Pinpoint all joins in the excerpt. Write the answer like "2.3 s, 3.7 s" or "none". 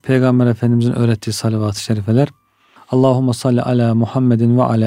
2.8 s